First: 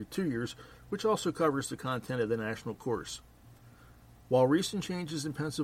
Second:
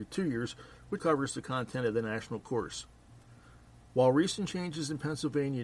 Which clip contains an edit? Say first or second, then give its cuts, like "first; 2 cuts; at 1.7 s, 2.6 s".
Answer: second; 1 cut; at 1.0 s